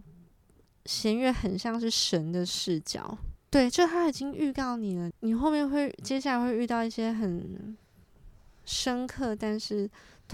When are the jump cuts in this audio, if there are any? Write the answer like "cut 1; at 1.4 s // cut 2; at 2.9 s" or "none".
cut 1; at 3.4 s // cut 2; at 5.1 s

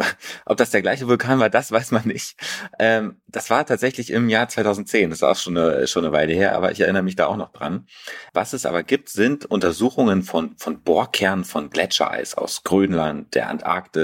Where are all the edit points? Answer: cut 1; at 8.3 s

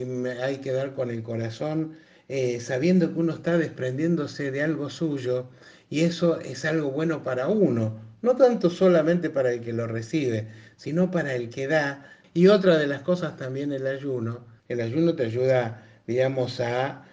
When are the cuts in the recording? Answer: cut 1; at 12.2 s // cut 2; at 14.6 s

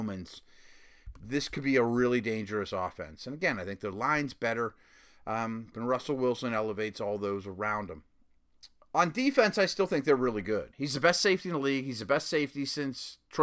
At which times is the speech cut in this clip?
cut 1; at 5.7 s // cut 2; at 10.7 s

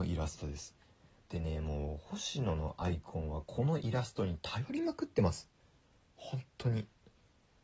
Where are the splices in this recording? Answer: cut 1; at 1.2 s

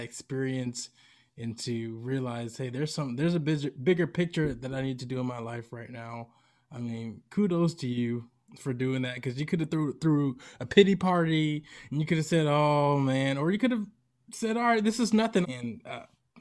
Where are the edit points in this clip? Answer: cut 1; at 15.4 s

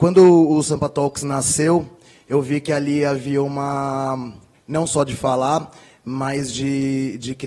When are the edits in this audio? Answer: cut 1; at 4.5 s

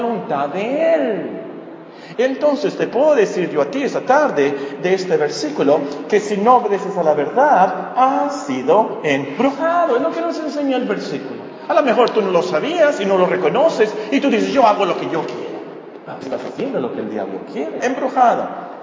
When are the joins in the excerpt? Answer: cut 1; at 2.1 s // cut 2; at 16.2 s // cut 3; at 17.8 s

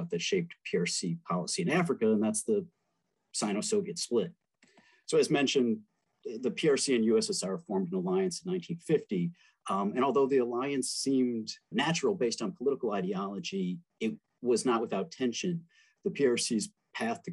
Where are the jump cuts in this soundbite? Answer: cut 1; at 11.7 s

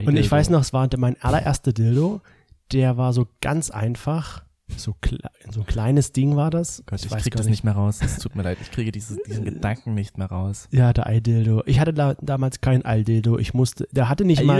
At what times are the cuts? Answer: none

